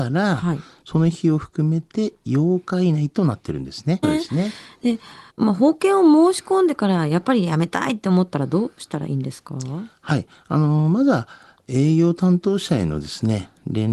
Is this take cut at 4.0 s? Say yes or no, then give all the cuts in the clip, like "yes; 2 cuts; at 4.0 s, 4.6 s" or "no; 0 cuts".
yes; 2 cuts; at 4.0 s, 5.3 s